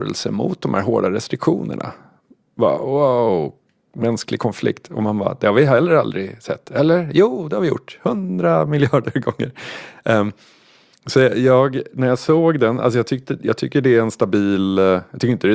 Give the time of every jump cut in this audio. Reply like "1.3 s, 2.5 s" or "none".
none